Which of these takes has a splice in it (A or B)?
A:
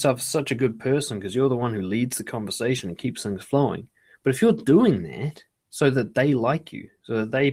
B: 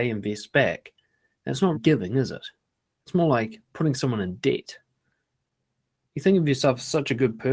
B